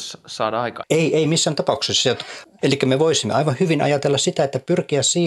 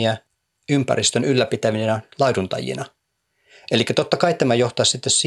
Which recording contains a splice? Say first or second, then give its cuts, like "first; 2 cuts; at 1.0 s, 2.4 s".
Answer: first; 1 cut; at 2.6 s